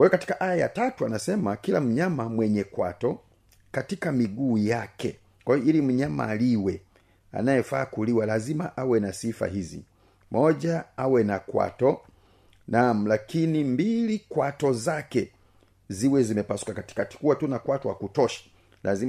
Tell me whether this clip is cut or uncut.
uncut